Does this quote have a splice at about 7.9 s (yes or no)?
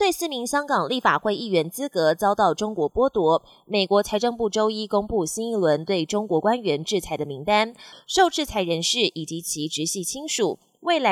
yes